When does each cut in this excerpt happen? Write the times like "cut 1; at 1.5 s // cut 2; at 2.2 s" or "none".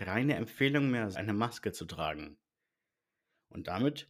cut 1; at 1.1 s